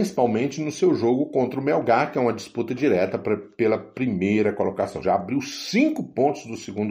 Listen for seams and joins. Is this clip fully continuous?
no; 1 cut; at 5.0 s

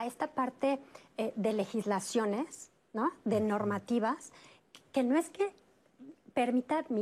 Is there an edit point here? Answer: no; 0 cuts

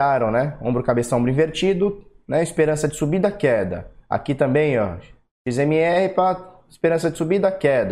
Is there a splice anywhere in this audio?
no; 0 cuts

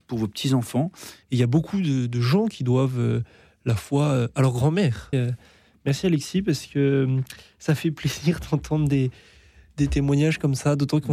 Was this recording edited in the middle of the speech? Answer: yes; 2 cuts; at 1.2 s, 5.1 s

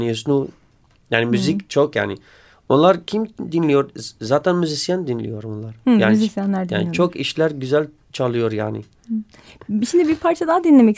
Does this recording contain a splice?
no; 0 cuts

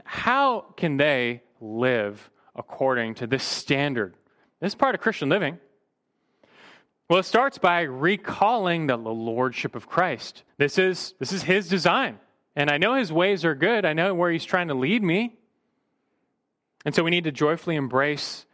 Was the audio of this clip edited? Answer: yes; 2 cuts; at 10.5 s, 12.5 s

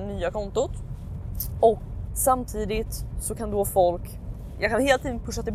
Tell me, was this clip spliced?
yes; 1 cut; at 2.1 s

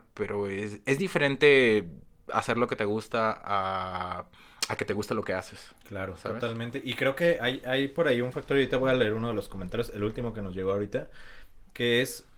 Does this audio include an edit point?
no; 0 cuts

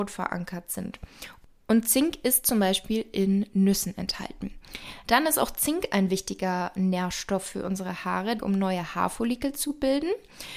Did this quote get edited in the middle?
yes; 2 cuts; at 5.0 s, 8.4 s

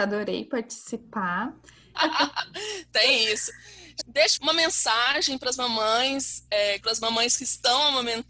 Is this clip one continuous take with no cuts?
no; 3 cuts; at 1.9 s, 4.0 s, 6.8 s

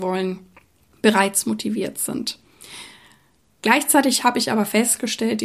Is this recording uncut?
yes; 0 cuts

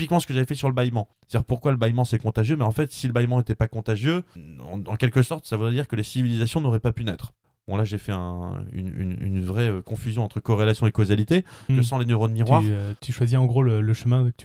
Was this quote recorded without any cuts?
no; 1 cut; at 11.7 s

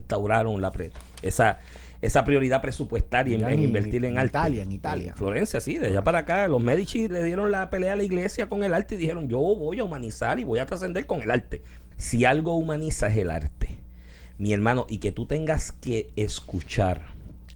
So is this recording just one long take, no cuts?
no; 2 cuts; at 7.1 s, 11.9 s

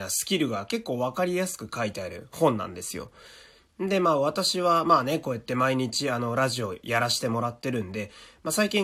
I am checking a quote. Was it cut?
no; 0 cuts

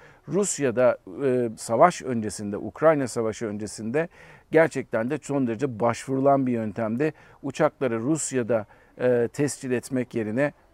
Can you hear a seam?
no; 0 cuts

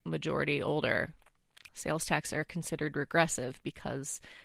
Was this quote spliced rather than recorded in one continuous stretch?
yes; 1 cut; at 1.7 s

